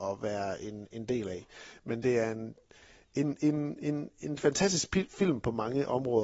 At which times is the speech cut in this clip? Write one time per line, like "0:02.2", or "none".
none